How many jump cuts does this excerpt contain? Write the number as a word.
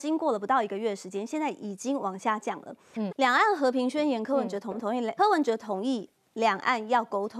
two